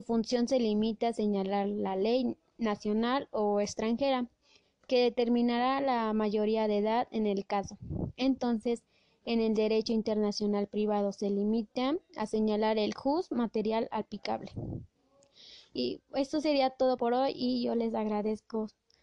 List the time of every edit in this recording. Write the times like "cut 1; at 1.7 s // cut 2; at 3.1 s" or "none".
cut 1; at 17.0 s